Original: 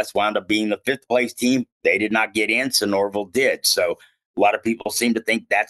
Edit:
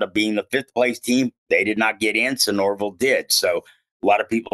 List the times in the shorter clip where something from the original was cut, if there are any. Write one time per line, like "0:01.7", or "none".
none